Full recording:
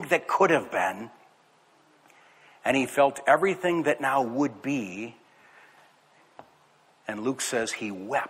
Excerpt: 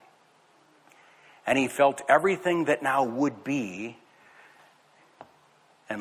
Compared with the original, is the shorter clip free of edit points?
yes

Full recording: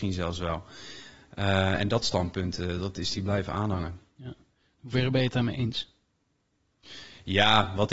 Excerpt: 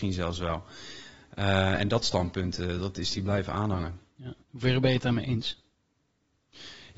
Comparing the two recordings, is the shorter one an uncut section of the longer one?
no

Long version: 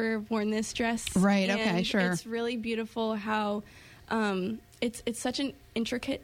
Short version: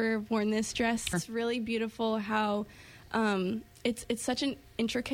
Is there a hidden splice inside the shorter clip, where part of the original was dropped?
yes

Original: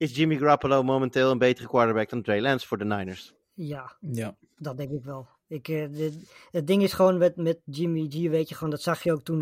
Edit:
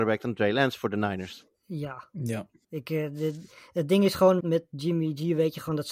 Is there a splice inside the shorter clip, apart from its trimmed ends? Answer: yes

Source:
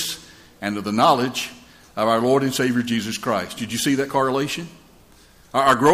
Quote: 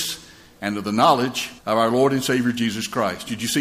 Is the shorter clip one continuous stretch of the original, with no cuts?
no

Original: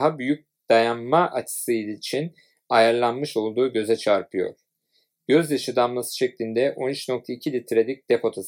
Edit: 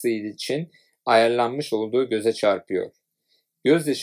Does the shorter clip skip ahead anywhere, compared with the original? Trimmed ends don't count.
no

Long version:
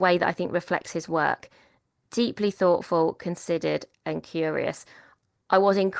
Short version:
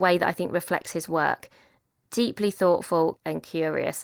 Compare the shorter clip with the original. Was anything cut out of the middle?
yes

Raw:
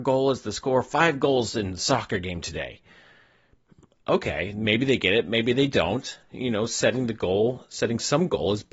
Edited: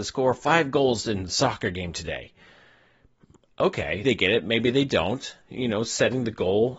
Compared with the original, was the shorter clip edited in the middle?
yes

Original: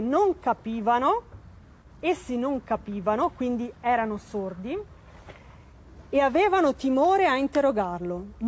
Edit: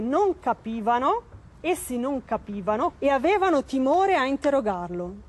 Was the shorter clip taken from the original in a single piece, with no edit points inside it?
no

